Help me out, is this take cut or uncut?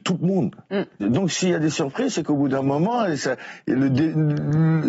cut